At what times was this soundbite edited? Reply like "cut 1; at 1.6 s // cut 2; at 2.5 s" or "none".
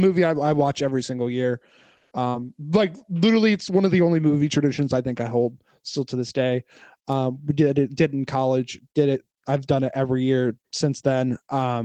none